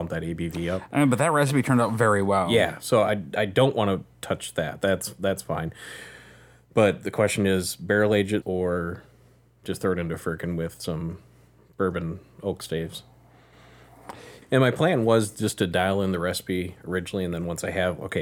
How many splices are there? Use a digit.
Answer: 2